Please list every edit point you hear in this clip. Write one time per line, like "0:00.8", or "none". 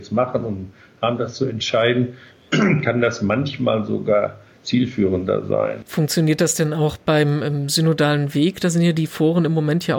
0:05.8